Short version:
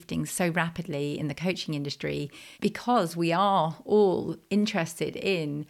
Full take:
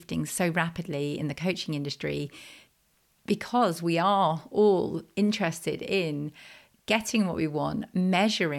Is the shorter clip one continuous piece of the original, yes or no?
no